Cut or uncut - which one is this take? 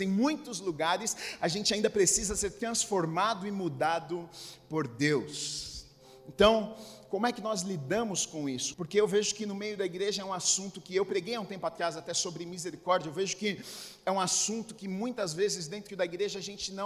cut